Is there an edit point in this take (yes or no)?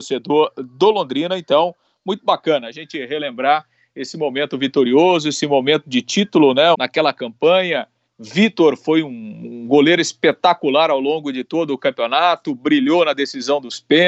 yes